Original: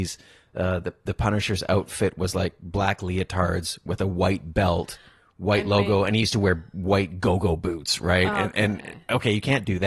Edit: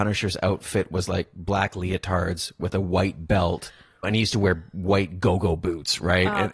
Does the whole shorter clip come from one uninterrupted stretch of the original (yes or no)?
no